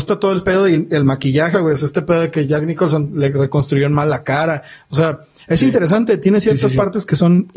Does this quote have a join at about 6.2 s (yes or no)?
no